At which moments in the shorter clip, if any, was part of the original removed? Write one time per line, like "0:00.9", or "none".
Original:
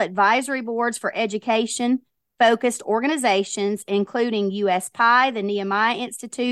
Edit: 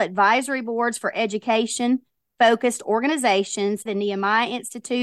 0:03.9